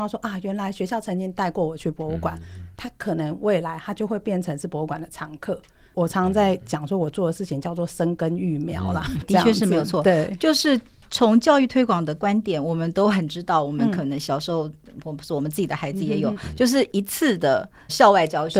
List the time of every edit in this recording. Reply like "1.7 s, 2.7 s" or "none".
9.2 s